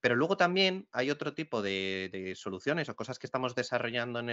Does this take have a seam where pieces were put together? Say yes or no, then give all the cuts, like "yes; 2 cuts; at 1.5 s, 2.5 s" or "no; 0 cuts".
no; 0 cuts